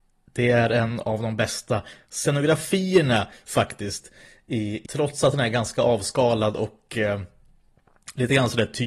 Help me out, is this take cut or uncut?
cut